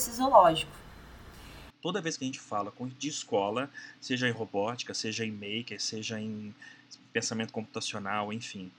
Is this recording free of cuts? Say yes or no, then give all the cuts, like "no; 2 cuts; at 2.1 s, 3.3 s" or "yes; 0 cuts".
no; 1 cut; at 1.7 s